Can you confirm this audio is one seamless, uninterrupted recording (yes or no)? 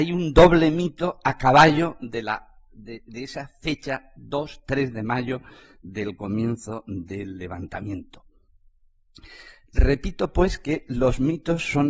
yes